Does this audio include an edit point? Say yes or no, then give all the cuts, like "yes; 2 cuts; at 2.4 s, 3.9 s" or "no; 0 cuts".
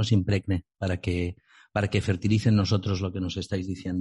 no; 0 cuts